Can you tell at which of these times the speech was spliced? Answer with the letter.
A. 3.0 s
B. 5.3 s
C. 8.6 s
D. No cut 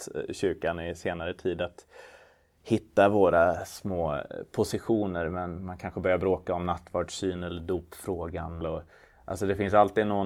C